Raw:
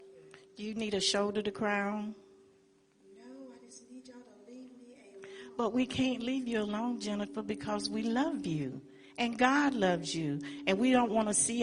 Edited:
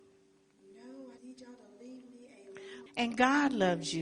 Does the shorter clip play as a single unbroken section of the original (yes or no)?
no